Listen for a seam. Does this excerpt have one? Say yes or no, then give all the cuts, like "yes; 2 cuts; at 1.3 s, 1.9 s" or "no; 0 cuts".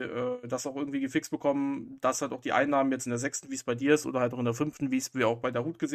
no; 0 cuts